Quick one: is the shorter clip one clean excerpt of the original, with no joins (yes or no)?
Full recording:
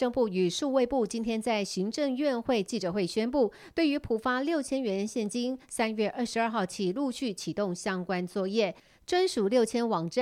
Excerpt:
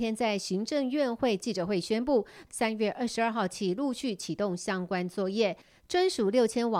no